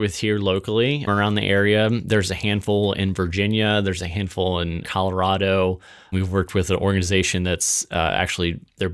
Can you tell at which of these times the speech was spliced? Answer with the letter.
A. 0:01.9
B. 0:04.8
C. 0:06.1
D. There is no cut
B